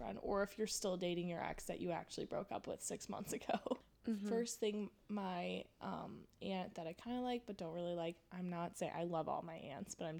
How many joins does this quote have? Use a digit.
1